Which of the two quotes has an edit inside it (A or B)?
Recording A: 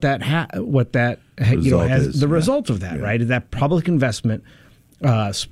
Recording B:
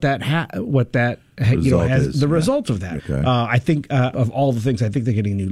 B